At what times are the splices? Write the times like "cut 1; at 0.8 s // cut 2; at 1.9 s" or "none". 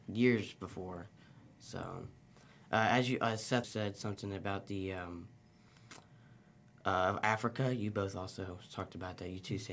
cut 1; at 3.6 s